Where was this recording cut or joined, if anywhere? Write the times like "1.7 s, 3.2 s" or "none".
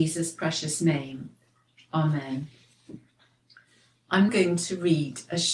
4.3 s